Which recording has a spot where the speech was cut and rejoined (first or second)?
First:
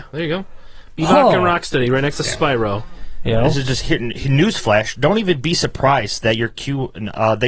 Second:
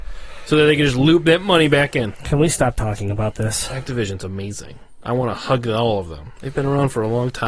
second